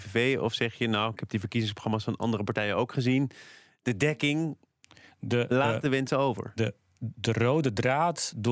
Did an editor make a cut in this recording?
no; 0 cuts

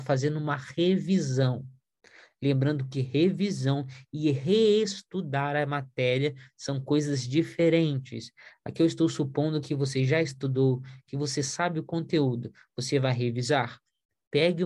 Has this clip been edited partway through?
no; 0 cuts

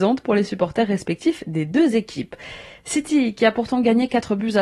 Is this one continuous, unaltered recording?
yes; 0 cuts

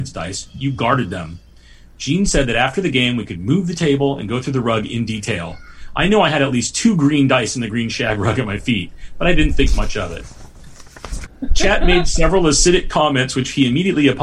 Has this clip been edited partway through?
yes; 1 cut; at 11.3 s

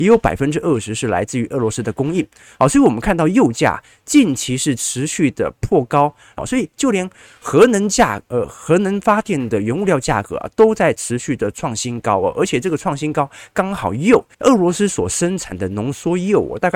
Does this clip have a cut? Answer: yes; 2 cuts; at 6.4 s, 14.3 s

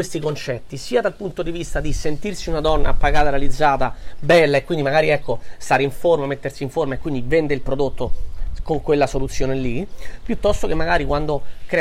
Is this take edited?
no; 0 cuts

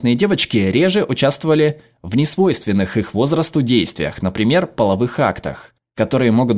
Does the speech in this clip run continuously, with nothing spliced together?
yes; 0 cuts

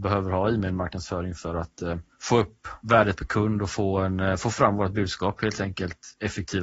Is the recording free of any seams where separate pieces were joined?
yes; 0 cuts

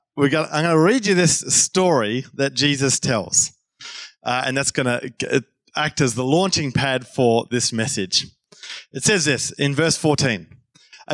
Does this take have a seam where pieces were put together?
no; 0 cuts

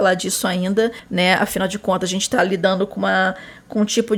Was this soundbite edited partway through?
no; 0 cuts

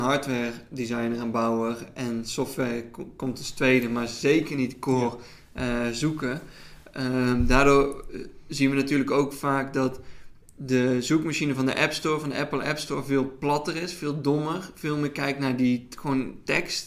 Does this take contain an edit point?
no; 0 cuts

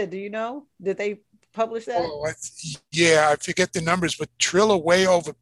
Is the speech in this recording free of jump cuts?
yes; 0 cuts

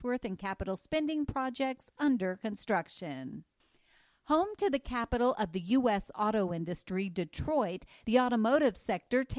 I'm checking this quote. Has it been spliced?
no; 0 cuts

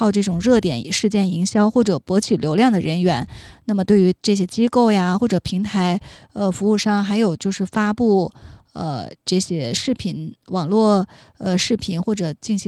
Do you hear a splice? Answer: no; 0 cuts

